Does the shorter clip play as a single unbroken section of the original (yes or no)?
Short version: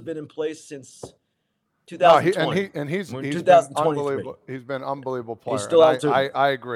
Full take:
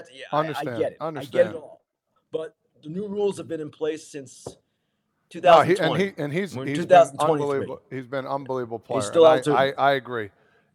yes